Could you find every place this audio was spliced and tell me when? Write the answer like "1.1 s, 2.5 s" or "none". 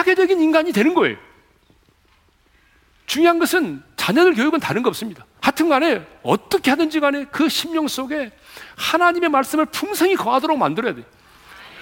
5.4 s